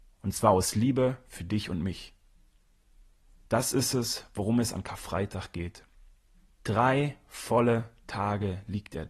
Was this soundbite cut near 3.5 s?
no; 1 cut; at 6.5 s

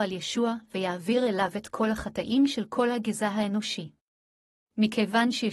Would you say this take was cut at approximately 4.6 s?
yes; 1 cut; at 4.6 s

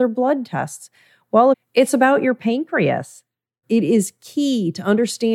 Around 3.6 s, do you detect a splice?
yes; 2 cuts; at 1.5 s, 3.6 s

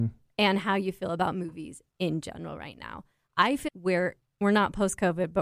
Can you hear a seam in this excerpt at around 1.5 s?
no; 1 cut; at 3.7 s

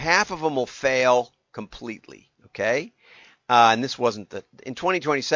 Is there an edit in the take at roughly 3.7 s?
no; 1 cut; at 2.4 s

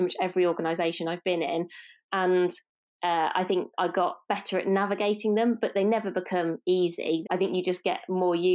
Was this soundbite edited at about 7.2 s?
yes; 1 cut; at 7.2 s

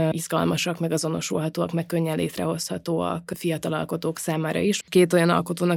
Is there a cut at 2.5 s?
no; 1 cut; at 4.8 s

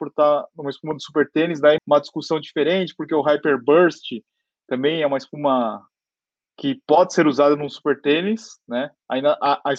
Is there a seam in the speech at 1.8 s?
yes; 1 cut; at 1.8 s

